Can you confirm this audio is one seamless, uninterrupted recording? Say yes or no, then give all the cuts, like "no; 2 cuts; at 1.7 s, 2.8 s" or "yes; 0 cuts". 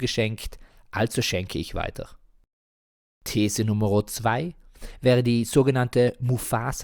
yes; 0 cuts